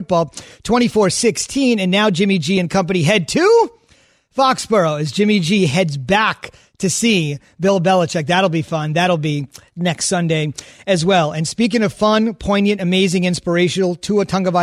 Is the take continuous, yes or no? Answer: yes